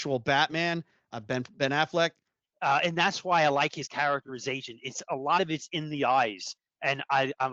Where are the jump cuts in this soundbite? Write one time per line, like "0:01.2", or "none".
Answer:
0:02.4